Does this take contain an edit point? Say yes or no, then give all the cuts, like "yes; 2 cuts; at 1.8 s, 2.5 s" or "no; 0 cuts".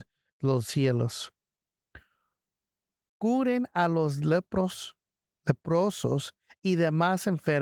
no; 0 cuts